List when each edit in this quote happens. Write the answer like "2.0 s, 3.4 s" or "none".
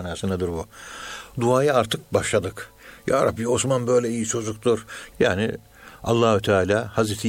5.1 s